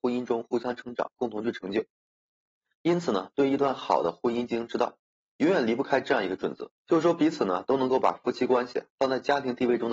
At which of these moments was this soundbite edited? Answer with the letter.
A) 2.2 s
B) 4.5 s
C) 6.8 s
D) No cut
C